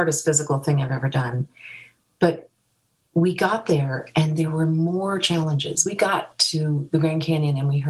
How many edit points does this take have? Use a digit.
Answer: 0